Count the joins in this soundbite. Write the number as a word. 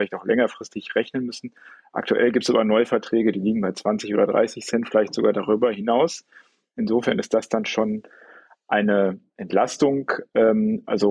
zero